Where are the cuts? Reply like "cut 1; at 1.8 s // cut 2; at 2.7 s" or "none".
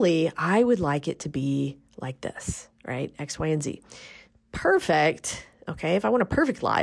none